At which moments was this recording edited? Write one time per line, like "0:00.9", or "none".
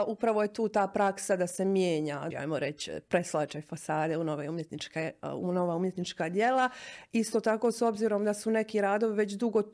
0:02.3